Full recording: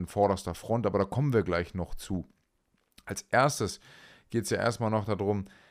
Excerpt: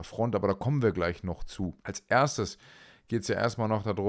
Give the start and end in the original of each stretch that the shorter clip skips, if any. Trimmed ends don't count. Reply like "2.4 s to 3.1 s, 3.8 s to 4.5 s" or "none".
2.3 s to 3.0 s